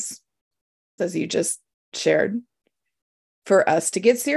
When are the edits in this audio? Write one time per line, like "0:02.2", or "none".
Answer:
0:01.0